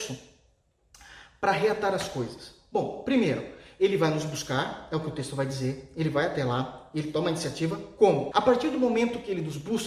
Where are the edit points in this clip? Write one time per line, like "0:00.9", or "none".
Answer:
0:08.3